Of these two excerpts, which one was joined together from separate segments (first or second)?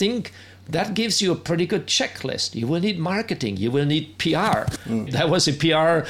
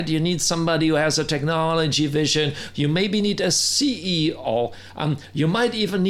first